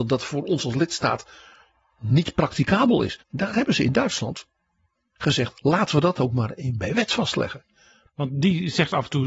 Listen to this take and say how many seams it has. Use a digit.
3